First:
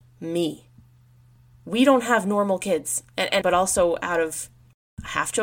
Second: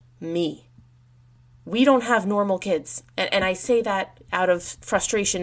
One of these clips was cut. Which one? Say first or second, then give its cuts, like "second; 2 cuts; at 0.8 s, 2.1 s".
first; 1 cut; at 3.4 s